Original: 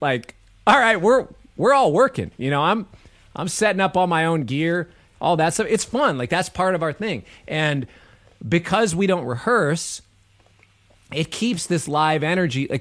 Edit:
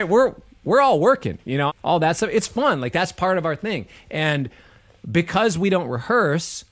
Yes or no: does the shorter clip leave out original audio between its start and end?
yes